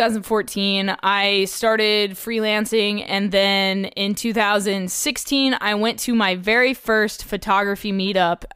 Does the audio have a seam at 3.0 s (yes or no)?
no